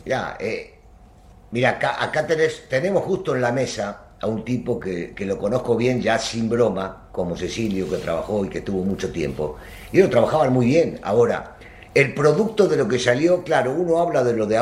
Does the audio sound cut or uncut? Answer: uncut